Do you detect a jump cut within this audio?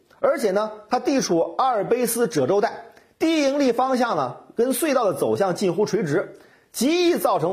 no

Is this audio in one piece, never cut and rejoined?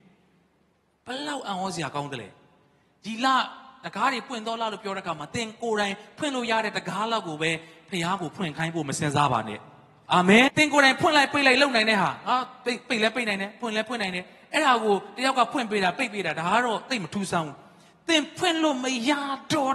no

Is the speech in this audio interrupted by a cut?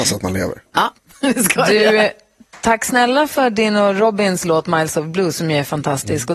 no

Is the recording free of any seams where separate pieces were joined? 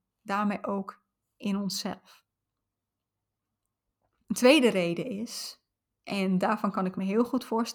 yes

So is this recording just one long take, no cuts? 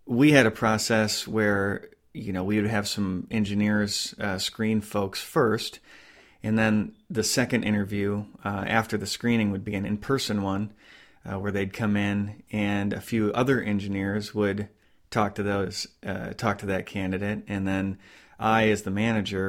yes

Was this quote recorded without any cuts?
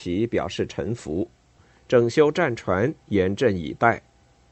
no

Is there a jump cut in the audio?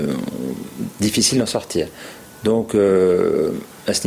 no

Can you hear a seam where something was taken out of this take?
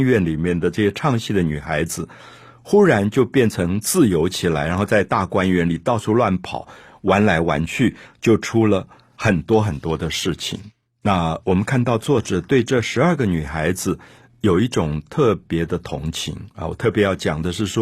no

